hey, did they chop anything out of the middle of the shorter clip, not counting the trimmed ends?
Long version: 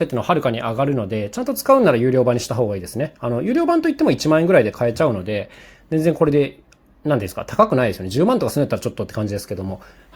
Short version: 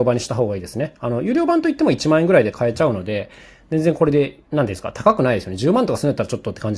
yes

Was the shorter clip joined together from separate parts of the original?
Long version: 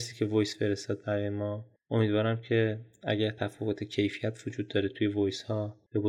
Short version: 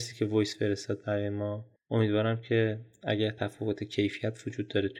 no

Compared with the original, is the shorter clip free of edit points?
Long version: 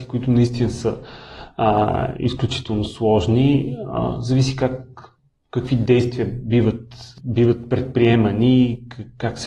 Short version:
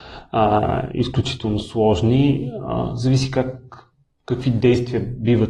yes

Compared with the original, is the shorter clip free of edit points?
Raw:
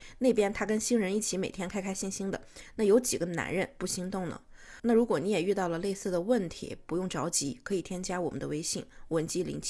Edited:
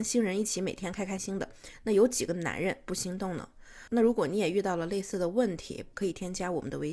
no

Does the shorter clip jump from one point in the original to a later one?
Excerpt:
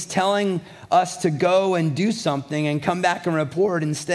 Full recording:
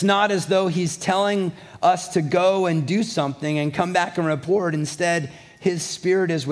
no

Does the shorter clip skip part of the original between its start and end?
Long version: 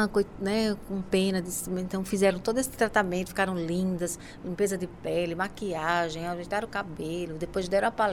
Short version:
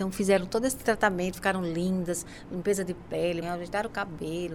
yes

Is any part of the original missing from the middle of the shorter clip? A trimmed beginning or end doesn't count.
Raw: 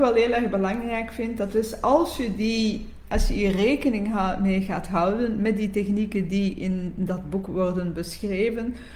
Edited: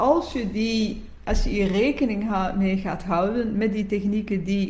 no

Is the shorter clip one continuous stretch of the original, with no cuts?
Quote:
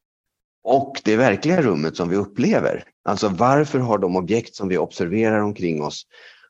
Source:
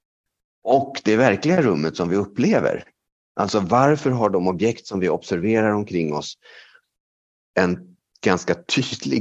no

